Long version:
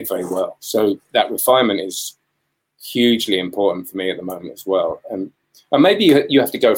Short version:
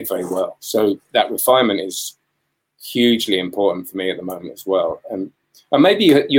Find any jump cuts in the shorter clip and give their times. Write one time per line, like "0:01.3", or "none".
none